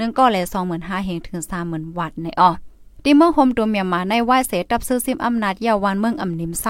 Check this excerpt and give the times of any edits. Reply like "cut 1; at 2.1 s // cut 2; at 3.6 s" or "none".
cut 1; at 2.9 s